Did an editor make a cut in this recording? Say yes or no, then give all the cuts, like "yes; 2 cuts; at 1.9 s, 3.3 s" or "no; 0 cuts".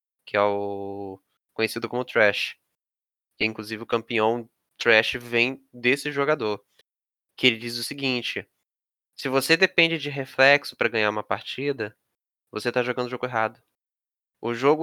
no; 0 cuts